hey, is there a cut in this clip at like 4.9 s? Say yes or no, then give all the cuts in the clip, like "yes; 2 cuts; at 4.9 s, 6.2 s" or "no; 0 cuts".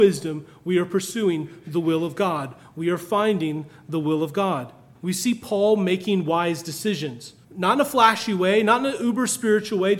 yes; 2 cuts; at 4.9 s, 7.4 s